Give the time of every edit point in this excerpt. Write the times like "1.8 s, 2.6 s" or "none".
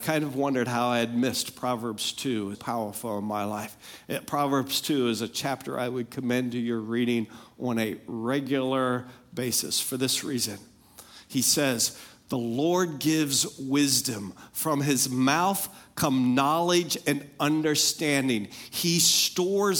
2.5 s

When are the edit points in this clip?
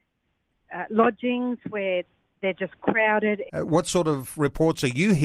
3.5 s

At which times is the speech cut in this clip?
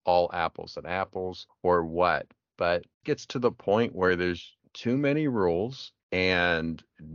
1.5 s, 3.0 s, 4.6 s

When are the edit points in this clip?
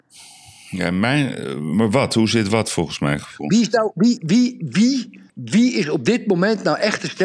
5.3 s

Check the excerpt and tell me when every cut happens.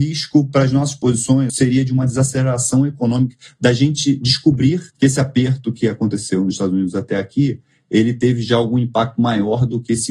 1.5 s, 4.9 s

